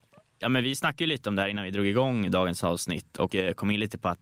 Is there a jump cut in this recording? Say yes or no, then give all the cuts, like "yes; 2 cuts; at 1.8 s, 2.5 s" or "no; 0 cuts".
no; 0 cuts